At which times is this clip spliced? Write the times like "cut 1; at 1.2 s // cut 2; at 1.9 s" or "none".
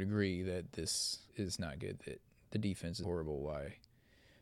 cut 1; at 1.3 s // cut 2; at 3.0 s